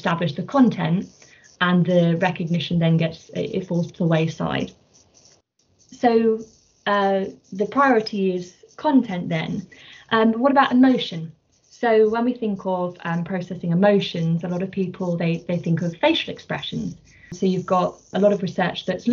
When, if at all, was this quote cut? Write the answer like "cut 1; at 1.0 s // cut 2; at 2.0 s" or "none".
none